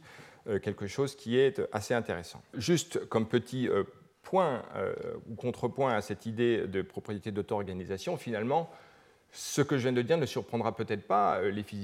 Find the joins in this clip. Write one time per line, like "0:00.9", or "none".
0:02.5